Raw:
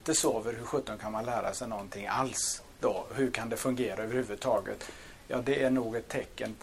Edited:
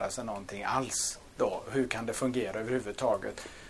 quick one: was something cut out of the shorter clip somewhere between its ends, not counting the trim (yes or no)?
no